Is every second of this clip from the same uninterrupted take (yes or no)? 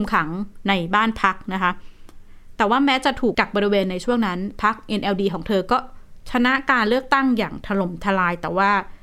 no